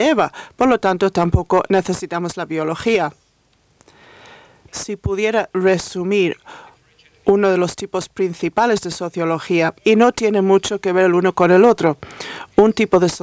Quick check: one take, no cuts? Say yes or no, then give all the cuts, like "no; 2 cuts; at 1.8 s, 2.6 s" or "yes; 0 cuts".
no; 2 cuts; at 4.7 s, 9.8 s